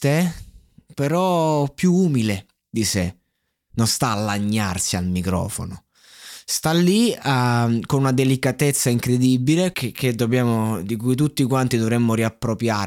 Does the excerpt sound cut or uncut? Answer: cut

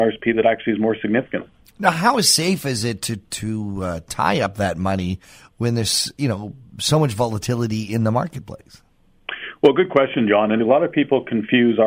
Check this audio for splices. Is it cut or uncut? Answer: cut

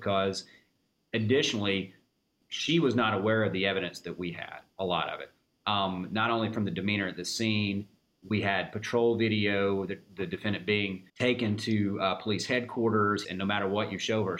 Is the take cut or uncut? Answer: cut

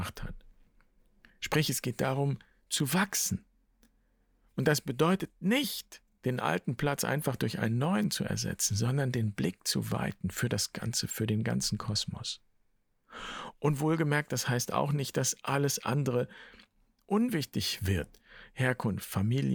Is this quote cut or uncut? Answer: uncut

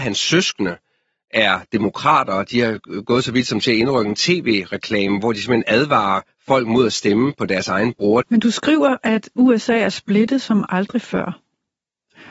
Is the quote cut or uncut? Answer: cut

